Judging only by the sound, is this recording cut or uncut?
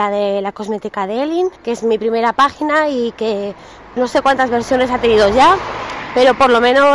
cut